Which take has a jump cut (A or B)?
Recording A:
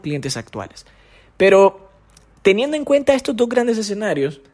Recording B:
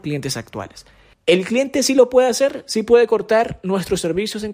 B